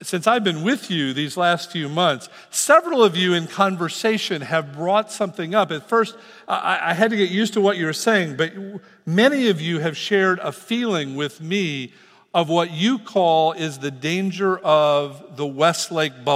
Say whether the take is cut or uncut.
uncut